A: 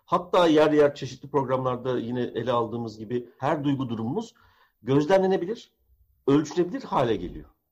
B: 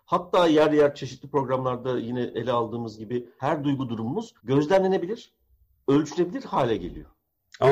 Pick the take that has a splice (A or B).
B